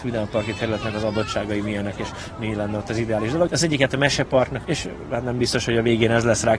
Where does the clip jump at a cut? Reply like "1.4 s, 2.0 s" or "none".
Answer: 3.5 s, 4.6 s